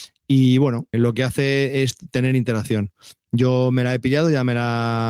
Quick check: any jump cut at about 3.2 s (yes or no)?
no